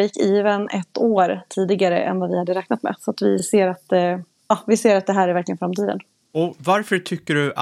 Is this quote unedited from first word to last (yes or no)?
yes